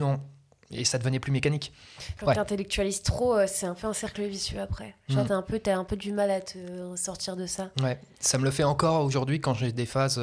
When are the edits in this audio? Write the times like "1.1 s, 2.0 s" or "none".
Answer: 2.2 s